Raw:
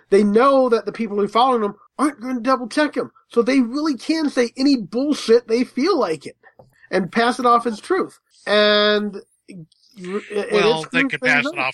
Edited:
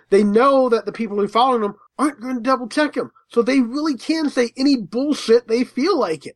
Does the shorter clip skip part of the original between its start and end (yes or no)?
no